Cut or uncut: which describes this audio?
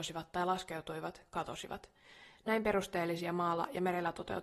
cut